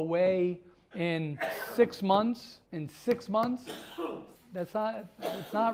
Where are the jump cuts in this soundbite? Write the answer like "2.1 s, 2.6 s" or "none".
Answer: 0.9 s, 2.6 s, 4.3 s